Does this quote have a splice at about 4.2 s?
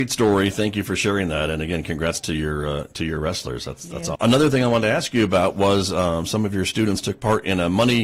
yes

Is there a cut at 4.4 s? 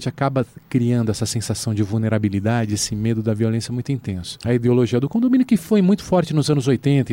yes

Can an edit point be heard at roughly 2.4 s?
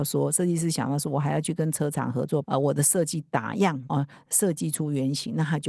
yes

